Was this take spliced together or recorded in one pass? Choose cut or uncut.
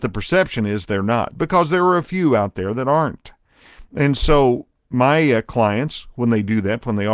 uncut